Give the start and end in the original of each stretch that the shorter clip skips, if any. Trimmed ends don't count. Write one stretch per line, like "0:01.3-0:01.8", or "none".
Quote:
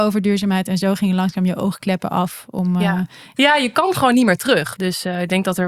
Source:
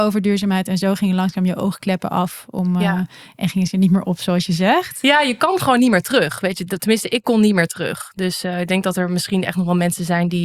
0:03.4-0:05.0
0:06.4-0:08.1